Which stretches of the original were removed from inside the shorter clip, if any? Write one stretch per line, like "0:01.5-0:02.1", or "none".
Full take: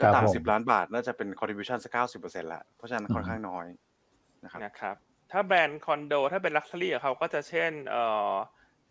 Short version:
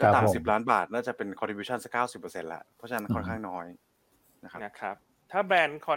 none